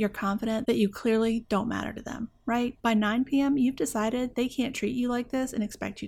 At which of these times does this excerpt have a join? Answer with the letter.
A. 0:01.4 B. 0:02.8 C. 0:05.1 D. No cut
B